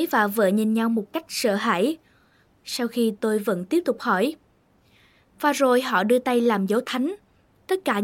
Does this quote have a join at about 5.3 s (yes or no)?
no